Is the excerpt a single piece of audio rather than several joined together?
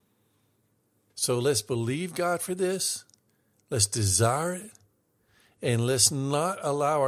no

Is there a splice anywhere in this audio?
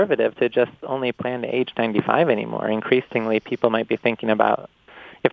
no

